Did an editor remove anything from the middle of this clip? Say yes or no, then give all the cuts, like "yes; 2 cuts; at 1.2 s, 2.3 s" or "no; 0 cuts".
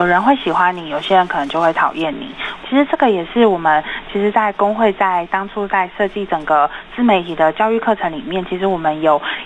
yes; 1 cut; at 2.6 s